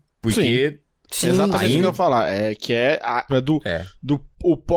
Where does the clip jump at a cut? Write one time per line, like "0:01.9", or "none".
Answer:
0:01.1
0:03.3